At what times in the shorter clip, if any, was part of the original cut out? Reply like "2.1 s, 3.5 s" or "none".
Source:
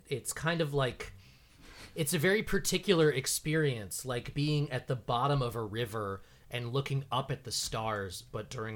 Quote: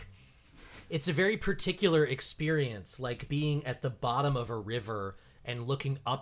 none